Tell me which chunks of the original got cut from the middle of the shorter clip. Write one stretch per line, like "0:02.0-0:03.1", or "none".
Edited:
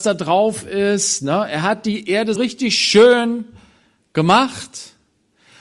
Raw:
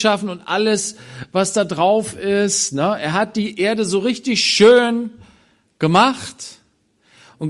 0:03.9-0:04.0